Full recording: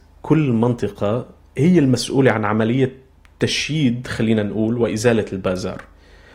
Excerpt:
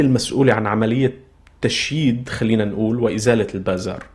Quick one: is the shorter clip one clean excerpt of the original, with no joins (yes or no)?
yes